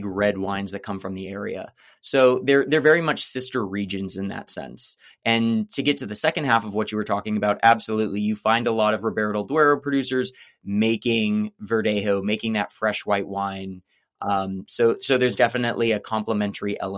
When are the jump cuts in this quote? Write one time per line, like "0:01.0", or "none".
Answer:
none